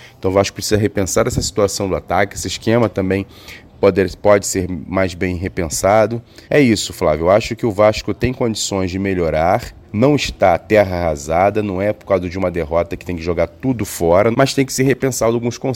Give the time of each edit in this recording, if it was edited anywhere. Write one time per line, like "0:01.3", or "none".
0:06.4
0:09.8
0:14.3

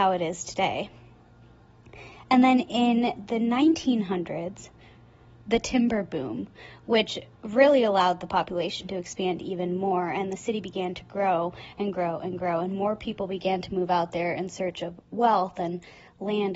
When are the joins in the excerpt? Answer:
0:05.4

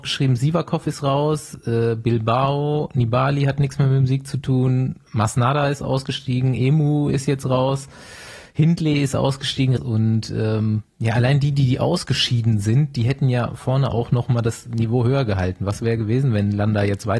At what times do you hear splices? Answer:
0:09.8

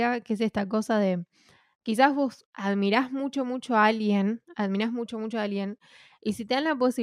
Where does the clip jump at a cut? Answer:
none

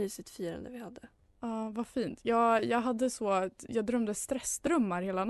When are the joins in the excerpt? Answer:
none

